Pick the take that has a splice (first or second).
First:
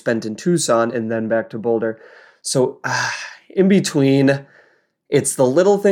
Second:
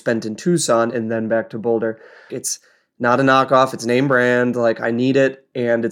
second